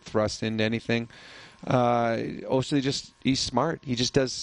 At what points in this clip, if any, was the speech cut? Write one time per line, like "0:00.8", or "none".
none